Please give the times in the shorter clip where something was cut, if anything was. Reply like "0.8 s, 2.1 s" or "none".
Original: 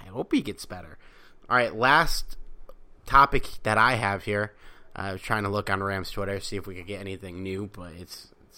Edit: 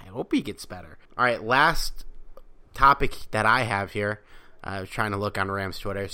1.0 s